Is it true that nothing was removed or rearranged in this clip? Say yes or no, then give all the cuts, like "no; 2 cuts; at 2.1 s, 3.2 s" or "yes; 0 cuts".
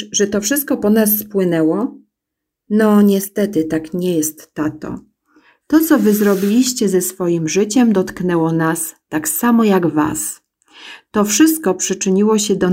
yes; 0 cuts